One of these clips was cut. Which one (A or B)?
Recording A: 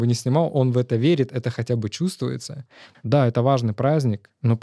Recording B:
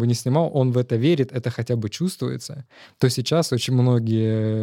A